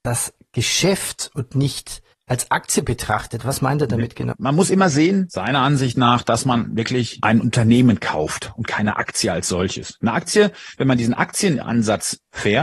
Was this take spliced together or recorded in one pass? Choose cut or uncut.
cut